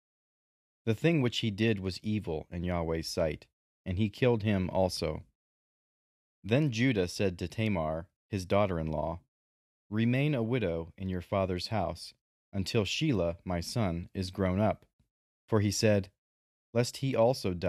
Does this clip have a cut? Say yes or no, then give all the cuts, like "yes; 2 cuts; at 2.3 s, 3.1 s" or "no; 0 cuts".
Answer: no; 0 cuts